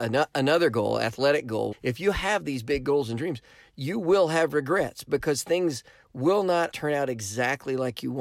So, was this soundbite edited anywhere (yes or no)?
yes